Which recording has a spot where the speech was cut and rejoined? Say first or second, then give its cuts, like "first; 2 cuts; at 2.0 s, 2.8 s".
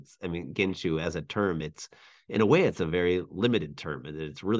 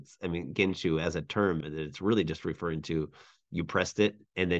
second; 1 cut; at 1.6 s